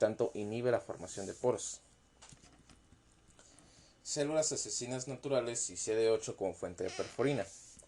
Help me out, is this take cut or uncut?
uncut